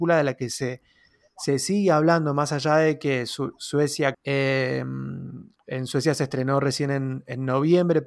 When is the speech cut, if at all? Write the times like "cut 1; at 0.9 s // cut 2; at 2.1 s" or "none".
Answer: cut 1; at 4.1 s

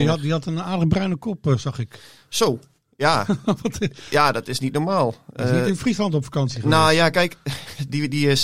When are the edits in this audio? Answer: none

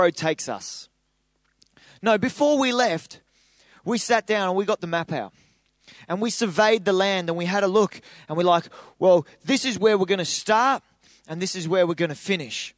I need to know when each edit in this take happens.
none

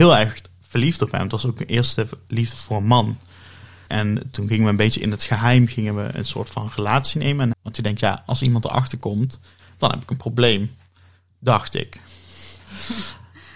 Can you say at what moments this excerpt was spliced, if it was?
cut 1; at 2.5 s // cut 2; at 3.9 s // cut 3; at 7.5 s

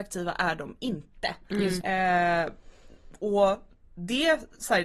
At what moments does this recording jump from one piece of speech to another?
cut 1; at 1.8 s

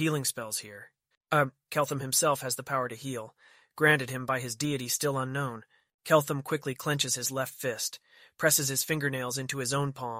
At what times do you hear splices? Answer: cut 1; at 1.1 s

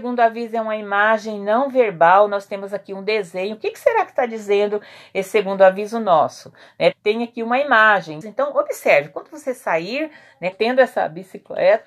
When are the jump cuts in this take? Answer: cut 1; at 6.9 s // cut 2; at 8.2 s // cut 3; at 10.5 s

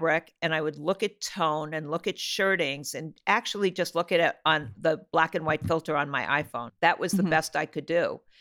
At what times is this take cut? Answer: none

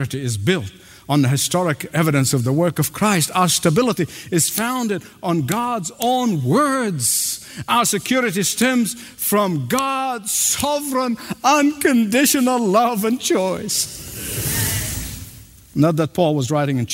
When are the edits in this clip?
cut 1; at 15.6 s

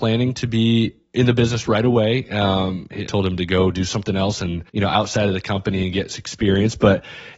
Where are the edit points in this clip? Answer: cut 1; at 3.1 s // cut 2; at 4.7 s

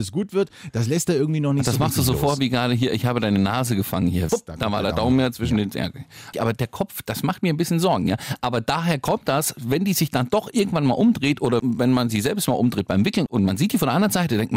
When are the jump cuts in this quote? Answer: cut 1; at 4.3 s // cut 2; at 6.3 s

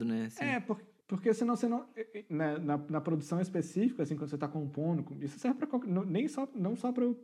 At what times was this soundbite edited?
cut 1; at 1.0 s

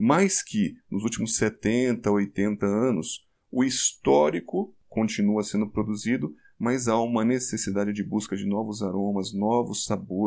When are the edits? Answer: none

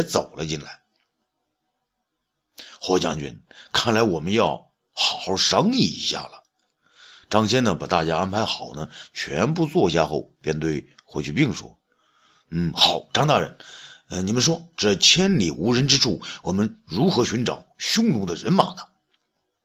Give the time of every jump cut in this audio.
none

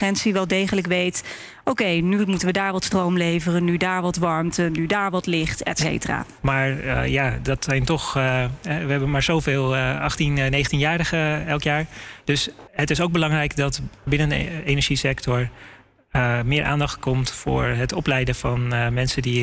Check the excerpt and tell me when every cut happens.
cut 1; at 6.4 s

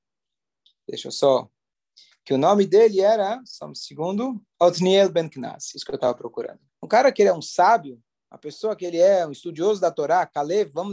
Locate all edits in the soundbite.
cut 1; at 6.7 s

